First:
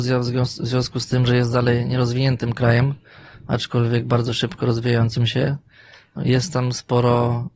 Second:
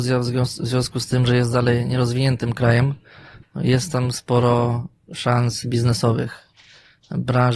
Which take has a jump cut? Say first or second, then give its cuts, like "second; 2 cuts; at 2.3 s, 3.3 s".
second; 1 cut; at 3.4 s